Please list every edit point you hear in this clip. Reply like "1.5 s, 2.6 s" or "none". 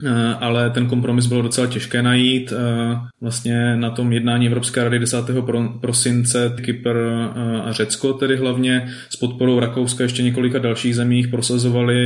6.6 s